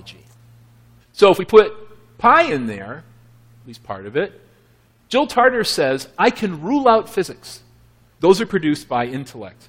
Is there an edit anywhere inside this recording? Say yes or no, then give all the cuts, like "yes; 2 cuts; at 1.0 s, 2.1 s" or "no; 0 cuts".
yes; 2 cuts; at 1.0 s, 8.1 s